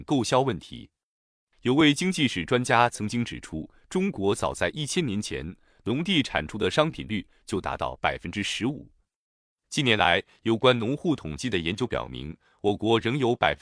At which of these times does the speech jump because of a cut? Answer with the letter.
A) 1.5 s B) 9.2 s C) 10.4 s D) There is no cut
D